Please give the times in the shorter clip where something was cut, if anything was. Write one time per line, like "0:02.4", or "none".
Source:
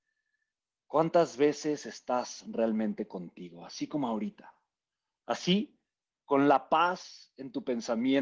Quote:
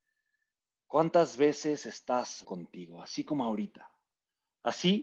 0:02.4